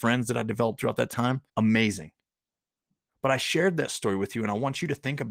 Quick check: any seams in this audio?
yes; 1 cut; at 1.5 s

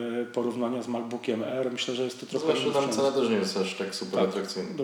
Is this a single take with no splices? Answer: yes; 0 cuts

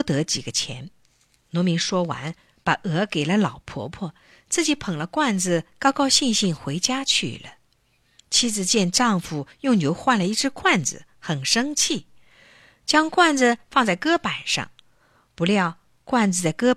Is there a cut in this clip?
no; 0 cuts

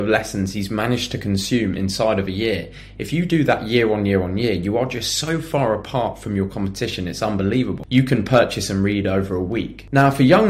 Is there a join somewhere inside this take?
yes; 1 cut; at 7.9 s

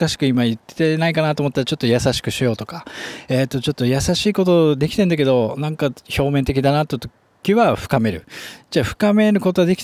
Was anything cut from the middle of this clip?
no; 0 cuts

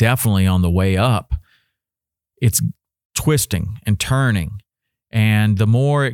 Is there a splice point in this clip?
yes; 1 cut; at 5.1 s

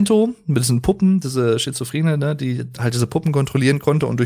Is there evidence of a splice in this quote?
no; 0 cuts

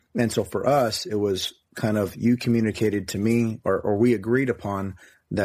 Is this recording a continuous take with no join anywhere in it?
yes; 0 cuts

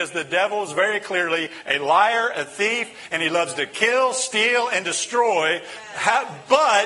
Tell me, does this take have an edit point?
no; 0 cuts

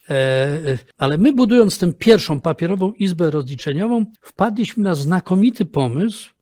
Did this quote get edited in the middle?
yes; 2 cuts; at 0.9 s, 4.2 s

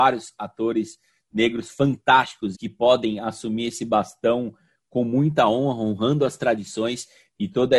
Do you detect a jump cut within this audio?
yes; 1 cut; at 2.5 s

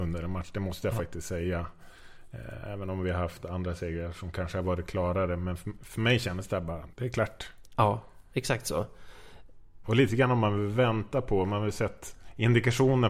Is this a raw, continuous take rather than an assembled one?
no; 2 cuts; at 6.9 s, 9.8 s

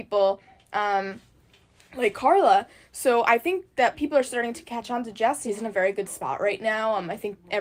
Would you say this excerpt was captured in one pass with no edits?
no; 1 cut; at 5.5 s

